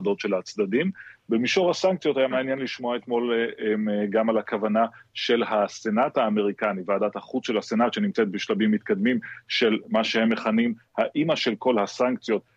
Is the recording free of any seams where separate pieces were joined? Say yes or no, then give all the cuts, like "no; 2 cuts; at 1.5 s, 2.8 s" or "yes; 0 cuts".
yes; 0 cuts